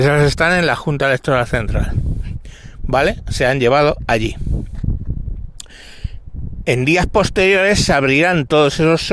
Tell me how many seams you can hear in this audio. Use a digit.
0